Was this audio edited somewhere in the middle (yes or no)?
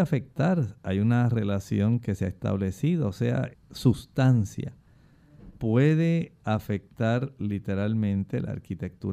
yes